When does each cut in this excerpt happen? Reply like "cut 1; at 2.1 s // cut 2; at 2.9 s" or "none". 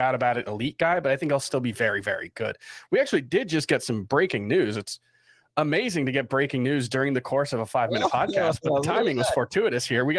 none